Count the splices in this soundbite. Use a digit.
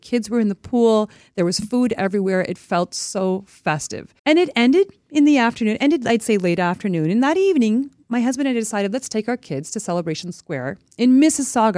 1